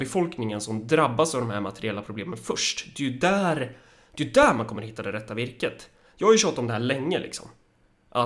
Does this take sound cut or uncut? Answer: uncut